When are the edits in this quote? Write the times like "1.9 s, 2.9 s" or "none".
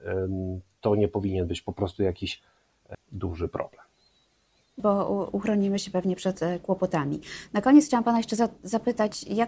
2.9 s, 4.8 s